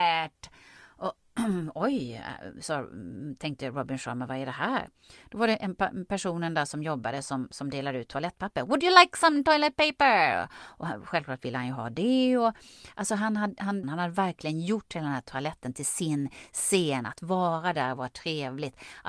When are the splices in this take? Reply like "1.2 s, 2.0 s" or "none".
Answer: 13.8 s